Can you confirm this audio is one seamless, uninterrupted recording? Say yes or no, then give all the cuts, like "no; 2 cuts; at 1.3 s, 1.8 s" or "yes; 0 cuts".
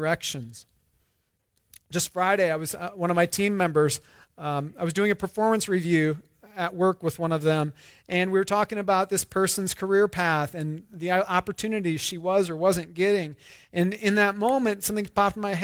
yes; 0 cuts